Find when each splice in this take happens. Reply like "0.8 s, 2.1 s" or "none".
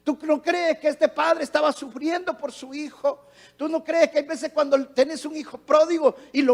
none